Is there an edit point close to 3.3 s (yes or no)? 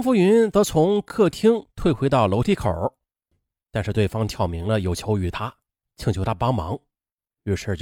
yes